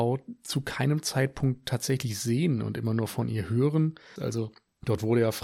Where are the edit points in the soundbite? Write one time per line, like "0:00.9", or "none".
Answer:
0:04.2